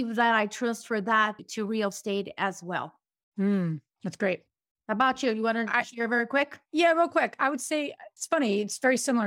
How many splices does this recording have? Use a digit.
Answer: 0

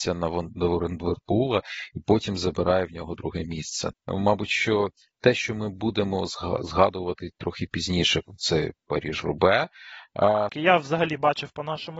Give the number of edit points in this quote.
2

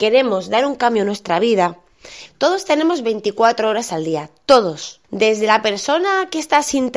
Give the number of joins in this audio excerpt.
2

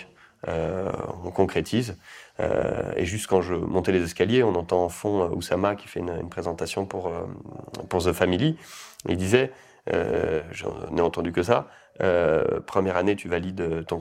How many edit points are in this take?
0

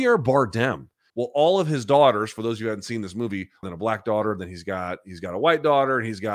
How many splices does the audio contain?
2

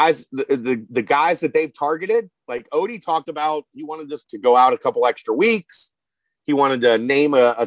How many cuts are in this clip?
1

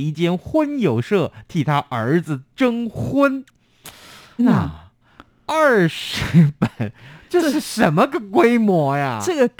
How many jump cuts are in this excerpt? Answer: 1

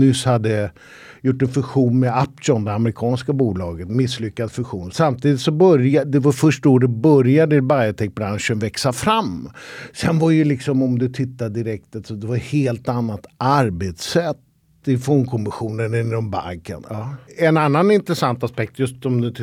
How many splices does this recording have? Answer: 1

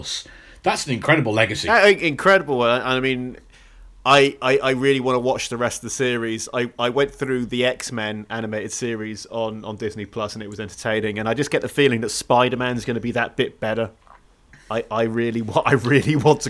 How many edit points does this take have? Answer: 0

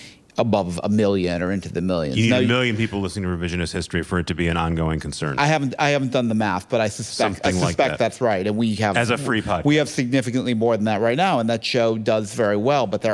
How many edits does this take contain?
0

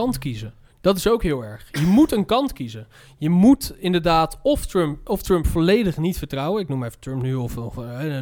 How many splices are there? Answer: 0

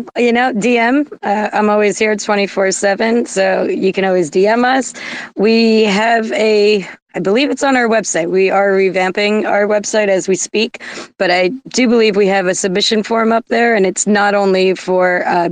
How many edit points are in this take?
0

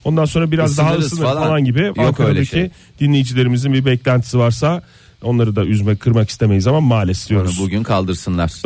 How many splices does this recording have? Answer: 0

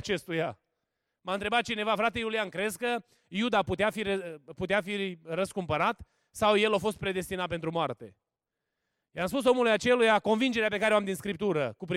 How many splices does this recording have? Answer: 0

